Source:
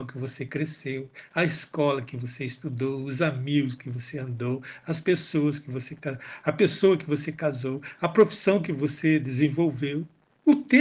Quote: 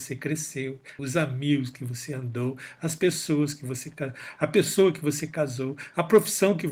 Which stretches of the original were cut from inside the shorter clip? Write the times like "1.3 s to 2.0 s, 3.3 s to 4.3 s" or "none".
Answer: 1.3 s to 3.0 s